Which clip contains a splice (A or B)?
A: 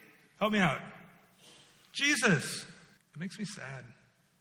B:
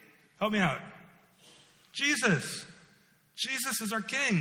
A